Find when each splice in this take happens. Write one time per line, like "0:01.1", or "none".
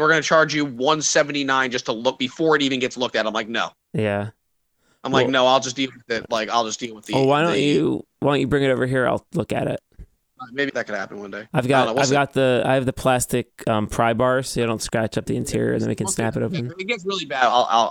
0:10.7